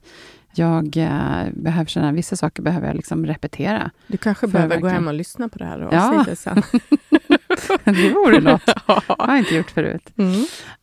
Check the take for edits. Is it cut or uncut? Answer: uncut